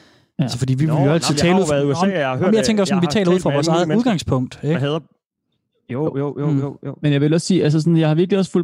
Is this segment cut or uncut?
uncut